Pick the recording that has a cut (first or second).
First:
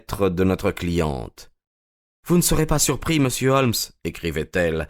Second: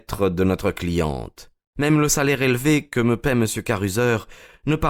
second